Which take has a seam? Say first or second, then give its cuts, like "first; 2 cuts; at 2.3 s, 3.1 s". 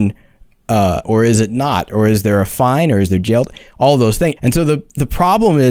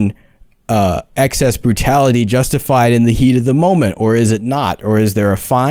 first; 2 cuts; at 1.0 s, 4.4 s